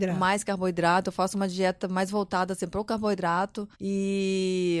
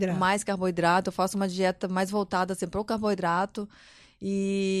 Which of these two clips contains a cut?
first; 1 cut; at 3.7 s

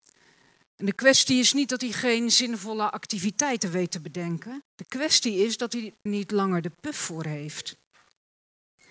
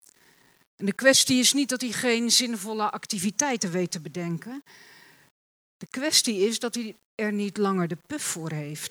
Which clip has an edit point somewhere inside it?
first; 2 cuts; at 4.6 s, 6.1 s

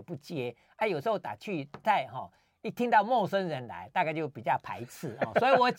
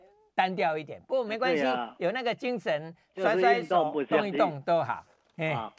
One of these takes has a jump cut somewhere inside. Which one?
first; 1 cut; at 1.8 s

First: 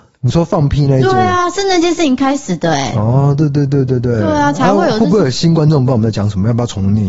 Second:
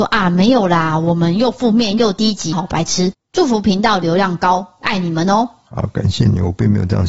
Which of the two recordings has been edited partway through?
second; 1 cut; at 2.5 s

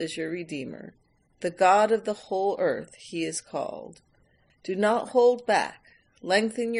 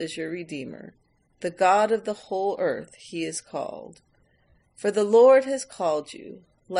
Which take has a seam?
first; 1 cut; at 4.5 s

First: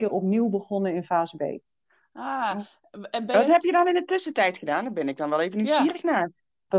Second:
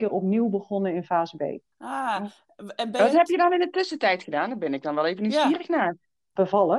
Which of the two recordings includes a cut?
second; 1 cut; at 1.7 s

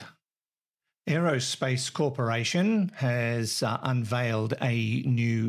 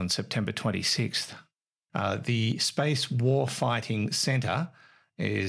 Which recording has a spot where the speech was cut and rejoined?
second; 1 cut; at 1.9 s

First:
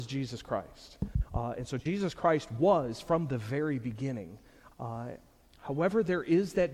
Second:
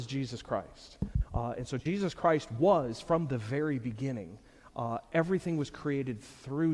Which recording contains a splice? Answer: first; 1 cut; at 4.7 s

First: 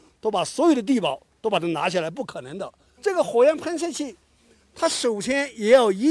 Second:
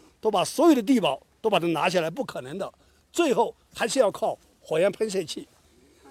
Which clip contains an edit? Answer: first; 1 cut; at 3.0 s

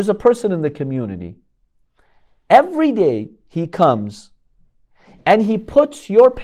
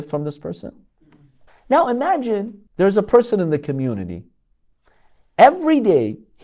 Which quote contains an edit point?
second; 2 cuts; at 1.5 s, 2.7 s

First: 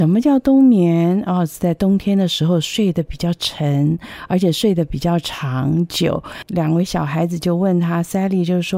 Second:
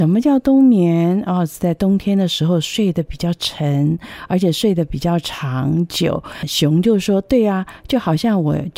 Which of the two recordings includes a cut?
first; 1 cut; at 6.4 s

